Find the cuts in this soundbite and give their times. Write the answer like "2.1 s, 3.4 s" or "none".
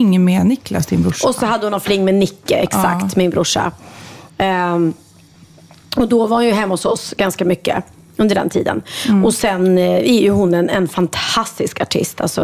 none